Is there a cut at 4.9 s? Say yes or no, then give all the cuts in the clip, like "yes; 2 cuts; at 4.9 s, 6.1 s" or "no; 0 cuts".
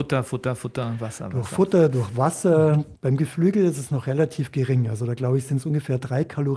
no; 1 cut; at 2.9 s